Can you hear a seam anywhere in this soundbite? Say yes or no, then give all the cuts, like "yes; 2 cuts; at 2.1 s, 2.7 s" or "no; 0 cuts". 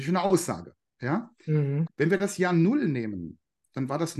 yes; 1 cut; at 1.9 s